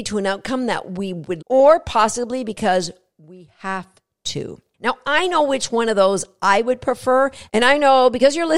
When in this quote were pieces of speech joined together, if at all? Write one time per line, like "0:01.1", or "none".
0:01.4

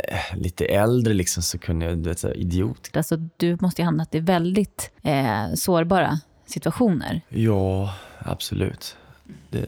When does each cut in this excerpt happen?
0:02.9
0:05.0

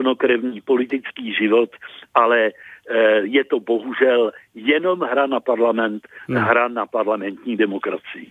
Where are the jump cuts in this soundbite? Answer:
none

